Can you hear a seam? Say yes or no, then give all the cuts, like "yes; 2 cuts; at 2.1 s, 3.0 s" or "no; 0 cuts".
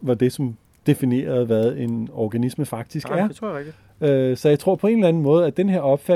no; 0 cuts